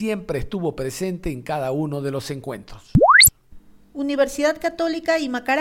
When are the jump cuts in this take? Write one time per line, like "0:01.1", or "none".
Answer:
none

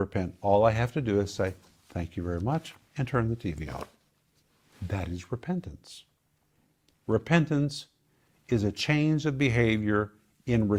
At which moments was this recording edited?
none

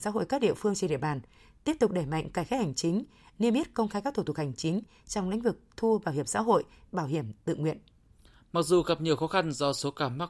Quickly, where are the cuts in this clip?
0:06.9

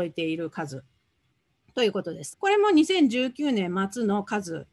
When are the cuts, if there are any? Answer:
0:02.3

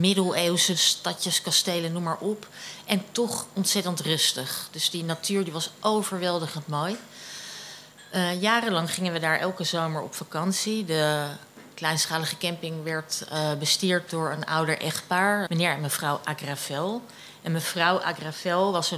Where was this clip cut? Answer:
0:15.5

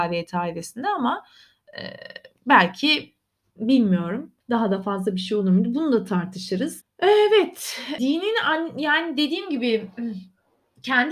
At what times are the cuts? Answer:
0:04.4
0:06.8
0:08.0

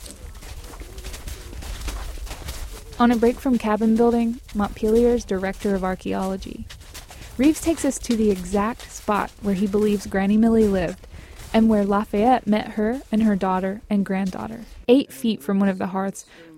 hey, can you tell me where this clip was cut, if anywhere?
0:04.5
0:14.8

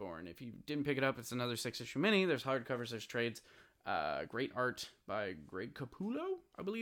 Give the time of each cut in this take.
none

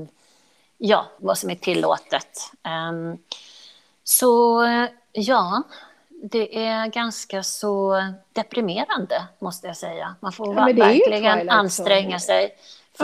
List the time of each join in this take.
0:01.2

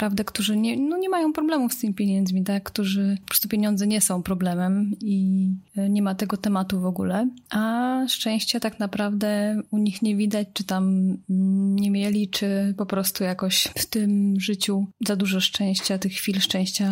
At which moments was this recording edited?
0:05.0

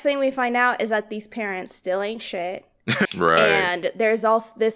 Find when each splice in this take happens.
0:03.1

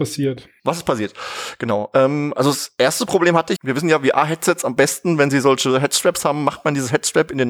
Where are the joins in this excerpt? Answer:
0:03.6

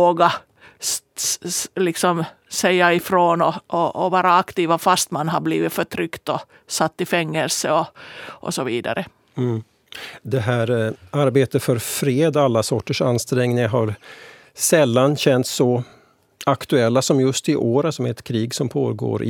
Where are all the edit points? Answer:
none

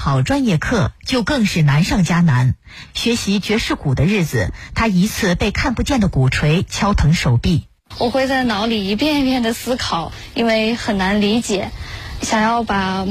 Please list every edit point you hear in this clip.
0:05.1
0:07.9

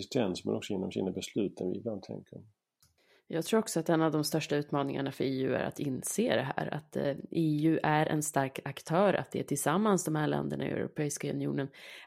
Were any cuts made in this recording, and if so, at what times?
none

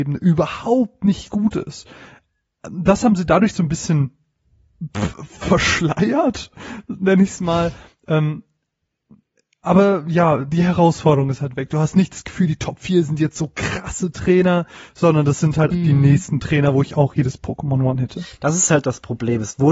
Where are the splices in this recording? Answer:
0:15.7

